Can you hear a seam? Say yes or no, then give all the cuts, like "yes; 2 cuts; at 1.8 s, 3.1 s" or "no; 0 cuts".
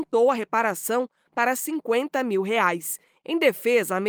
yes; 1 cut; at 3.2 s